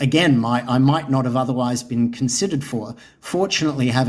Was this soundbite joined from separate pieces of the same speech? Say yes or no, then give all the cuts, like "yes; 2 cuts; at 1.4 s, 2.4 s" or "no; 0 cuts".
no; 0 cuts